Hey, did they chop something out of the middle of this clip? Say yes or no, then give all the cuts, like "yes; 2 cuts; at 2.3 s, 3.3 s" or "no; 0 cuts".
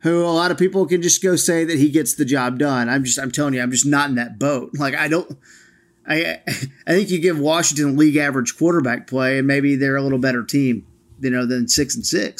no; 0 cuts